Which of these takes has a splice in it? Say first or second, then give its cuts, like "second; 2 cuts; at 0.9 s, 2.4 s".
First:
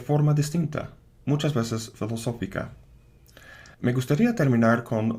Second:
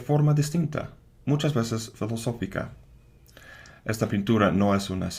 first; 1 cut; at 3.7 s